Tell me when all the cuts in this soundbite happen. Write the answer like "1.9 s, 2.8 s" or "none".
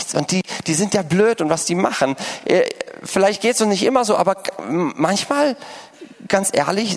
none